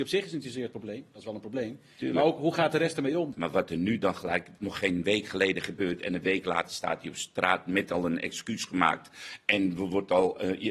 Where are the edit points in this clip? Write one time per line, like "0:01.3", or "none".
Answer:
0:03.3